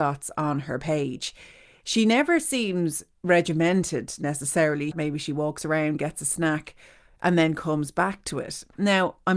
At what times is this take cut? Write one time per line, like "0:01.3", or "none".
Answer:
0:04.9